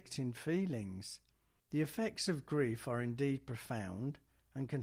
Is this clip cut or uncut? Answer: cut